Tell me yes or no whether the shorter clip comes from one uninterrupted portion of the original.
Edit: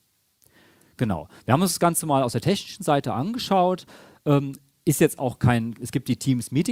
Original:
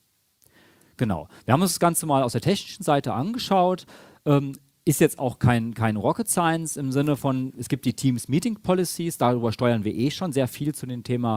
no